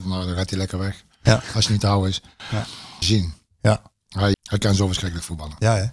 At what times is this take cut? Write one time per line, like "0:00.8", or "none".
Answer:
0:03.0
0:04.3